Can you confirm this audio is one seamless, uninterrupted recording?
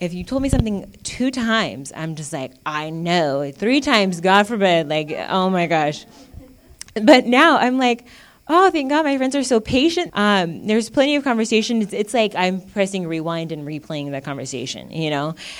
no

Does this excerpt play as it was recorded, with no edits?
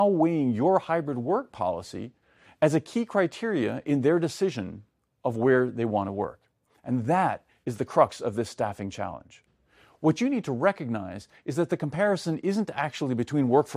yes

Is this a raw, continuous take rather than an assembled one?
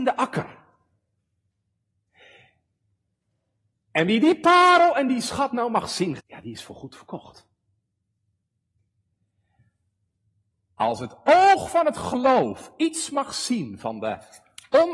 no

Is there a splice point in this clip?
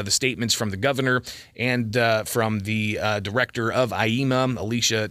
no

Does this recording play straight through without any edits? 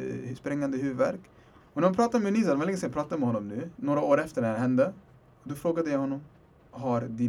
no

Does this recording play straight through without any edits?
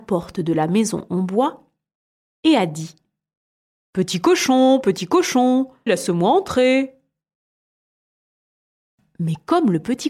no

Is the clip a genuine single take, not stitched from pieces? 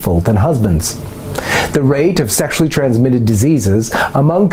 yes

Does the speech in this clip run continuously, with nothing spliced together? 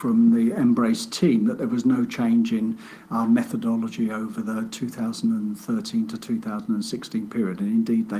yes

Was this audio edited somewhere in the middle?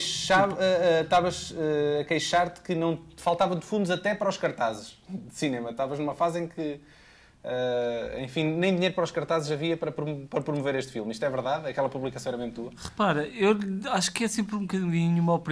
no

